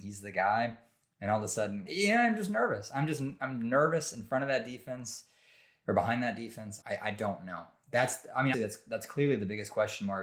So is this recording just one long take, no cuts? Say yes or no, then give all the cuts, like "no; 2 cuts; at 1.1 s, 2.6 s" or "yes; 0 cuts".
no; 3 cuts; at 1.9 s, 6.8 s, 8.5 s